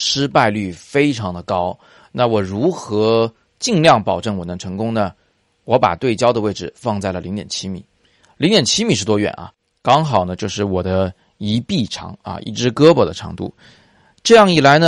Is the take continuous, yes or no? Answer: yes